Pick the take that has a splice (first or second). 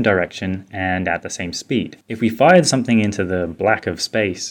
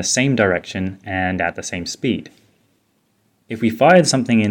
first